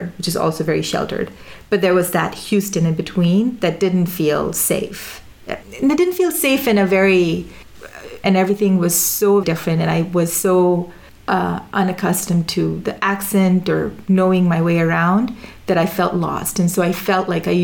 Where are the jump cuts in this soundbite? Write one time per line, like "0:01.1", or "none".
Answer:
0:05.6
0:08.2
0:09.4